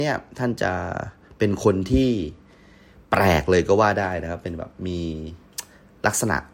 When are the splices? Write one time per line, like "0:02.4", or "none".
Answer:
none